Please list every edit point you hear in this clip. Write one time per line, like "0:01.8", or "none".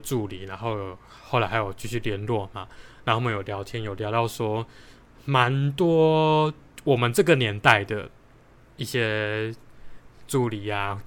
none